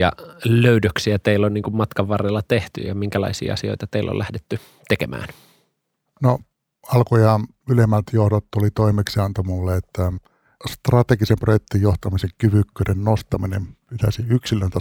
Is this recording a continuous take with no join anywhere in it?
yes; 0 cuts

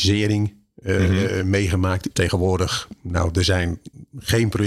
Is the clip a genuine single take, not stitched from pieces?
no; 1 cut; at 2.1 s

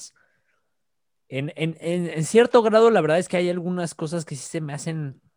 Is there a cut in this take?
no; 0 cuts

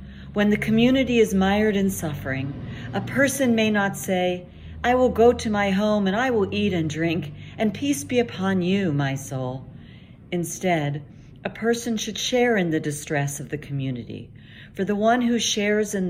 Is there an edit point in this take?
no; 0 cuts

